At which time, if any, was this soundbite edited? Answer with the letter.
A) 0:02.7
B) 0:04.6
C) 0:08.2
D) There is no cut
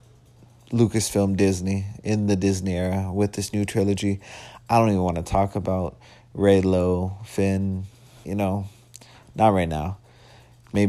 C